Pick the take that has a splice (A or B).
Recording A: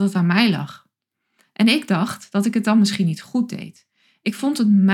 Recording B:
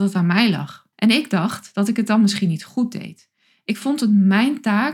B